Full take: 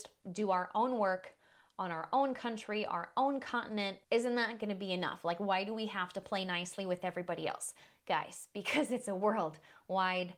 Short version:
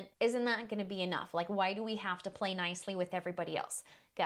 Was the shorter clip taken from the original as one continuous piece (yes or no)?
yes